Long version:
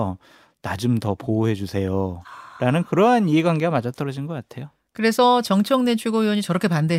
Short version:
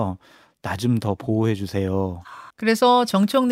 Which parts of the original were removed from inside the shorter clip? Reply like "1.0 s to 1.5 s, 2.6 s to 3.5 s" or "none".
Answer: 2.5 s to 4.9 s